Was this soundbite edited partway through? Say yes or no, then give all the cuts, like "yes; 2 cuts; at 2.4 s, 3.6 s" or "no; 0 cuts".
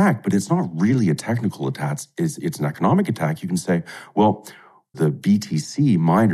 yes; 1 cut; at 4.9 s